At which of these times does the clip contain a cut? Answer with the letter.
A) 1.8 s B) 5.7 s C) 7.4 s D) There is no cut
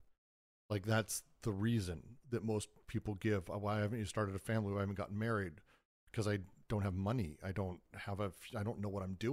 D